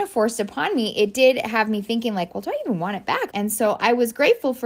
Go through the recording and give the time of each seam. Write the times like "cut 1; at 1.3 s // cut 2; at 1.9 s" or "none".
cut 1; at 3.3 s